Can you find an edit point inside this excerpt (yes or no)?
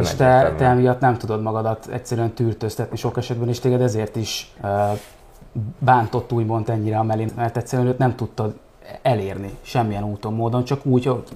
yes